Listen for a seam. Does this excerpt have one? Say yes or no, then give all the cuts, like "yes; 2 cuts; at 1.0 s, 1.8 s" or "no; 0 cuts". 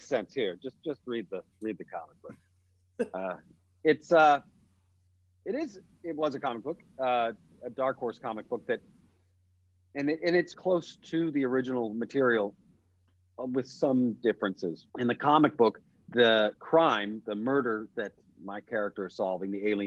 yes; 2 cuts; at 10.5 s, 14.9 s